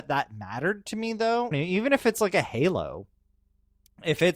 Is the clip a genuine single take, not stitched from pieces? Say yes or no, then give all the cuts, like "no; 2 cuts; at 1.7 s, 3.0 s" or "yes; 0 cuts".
no; 1 cut; at 1.5 s